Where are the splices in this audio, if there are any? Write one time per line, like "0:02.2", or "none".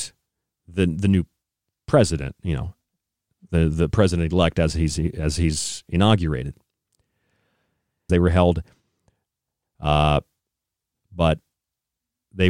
0:08.1
0:10.9